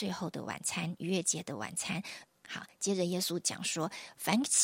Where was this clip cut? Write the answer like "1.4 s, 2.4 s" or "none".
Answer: 2.2 s